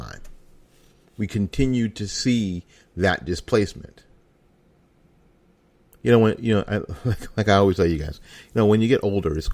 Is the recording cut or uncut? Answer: uncut